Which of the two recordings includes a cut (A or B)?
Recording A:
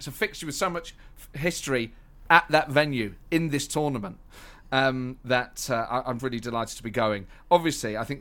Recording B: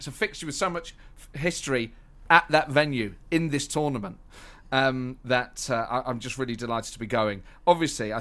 A